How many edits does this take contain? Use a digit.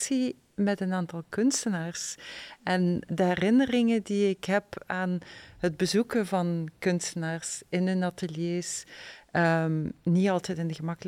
1